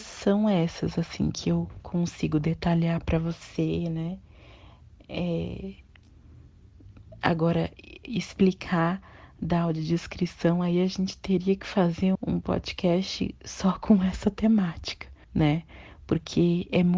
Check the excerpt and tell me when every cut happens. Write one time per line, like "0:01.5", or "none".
0:12.1
0:15.2

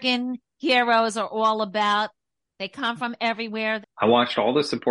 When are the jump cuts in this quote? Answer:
0:03.8

